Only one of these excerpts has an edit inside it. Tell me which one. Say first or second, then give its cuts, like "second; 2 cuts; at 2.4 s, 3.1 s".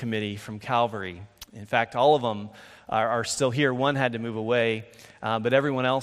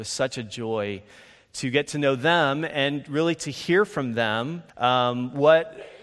second; 1 cut; at 4.7 s